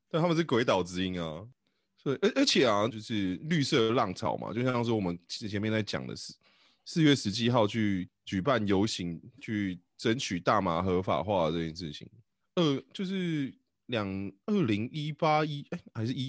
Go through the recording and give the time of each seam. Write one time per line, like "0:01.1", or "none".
0:02.9